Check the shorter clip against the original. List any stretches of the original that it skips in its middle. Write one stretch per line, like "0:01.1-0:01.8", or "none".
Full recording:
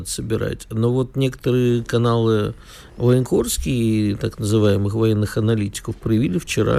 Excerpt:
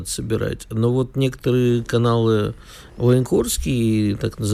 none